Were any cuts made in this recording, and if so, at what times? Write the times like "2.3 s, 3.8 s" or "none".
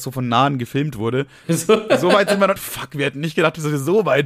1.4 s, 2.6 s